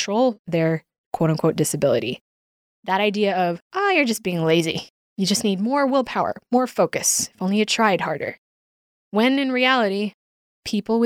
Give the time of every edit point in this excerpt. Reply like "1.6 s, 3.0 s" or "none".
none